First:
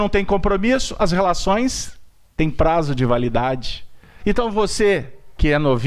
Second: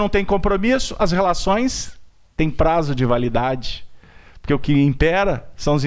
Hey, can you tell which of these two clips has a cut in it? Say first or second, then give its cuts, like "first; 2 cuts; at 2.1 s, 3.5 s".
first; 1 cut; at 4.2 s